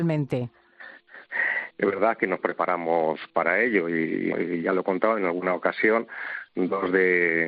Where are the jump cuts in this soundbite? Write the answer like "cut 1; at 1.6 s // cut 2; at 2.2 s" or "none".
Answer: cut 1; at 1.7 s // cut 2; at 4.3 s